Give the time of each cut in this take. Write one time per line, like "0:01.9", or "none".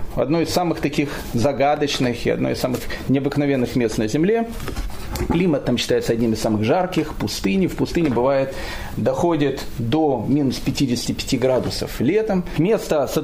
none